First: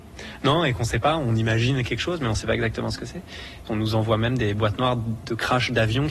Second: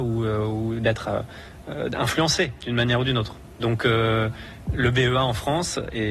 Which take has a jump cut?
first; 1 cut; at 3.7 s

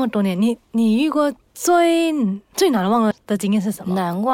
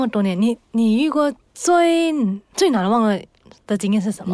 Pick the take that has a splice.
first; 1 cut; at 3.1 s

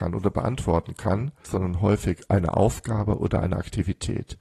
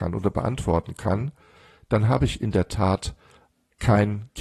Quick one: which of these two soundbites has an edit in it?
first; 1 cut; at 1.4 s

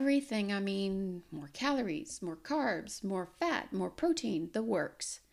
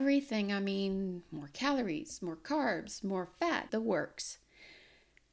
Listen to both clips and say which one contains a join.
second; 1 cut; at 3.7 s

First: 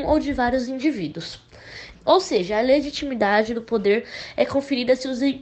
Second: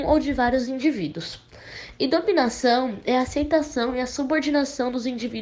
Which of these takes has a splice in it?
first; 1 cut; at 1.9 s

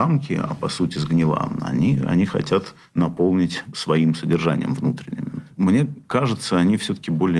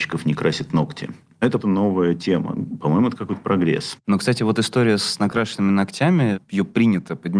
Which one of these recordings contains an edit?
second; 1 cut; at 1.6 s

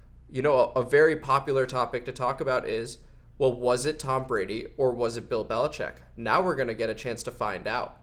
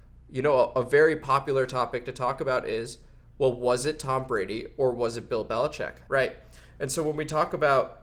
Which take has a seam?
second; 1 cut; at 6.1 s

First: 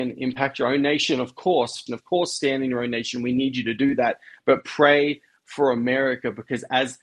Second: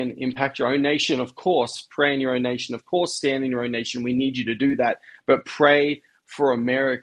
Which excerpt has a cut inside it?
first; 1 cut; at 1.9 s

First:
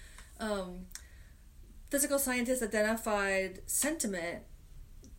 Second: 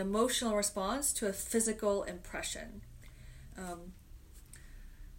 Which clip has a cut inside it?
second; 1 cut; at 3.5 s

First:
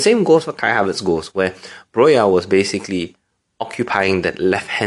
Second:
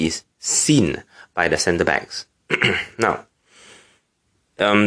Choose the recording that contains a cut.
second; 1 cut; at 2.5 s

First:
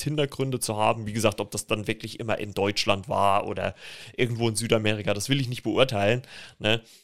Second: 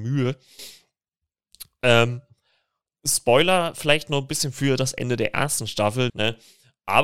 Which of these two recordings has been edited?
second; 1 cut; at 6.1 s

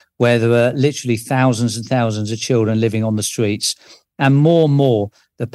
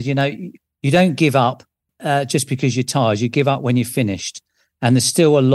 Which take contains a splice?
second; 1 cut; at 1.9 s

